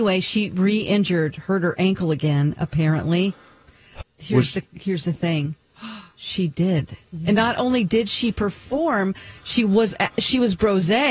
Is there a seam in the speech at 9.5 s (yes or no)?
no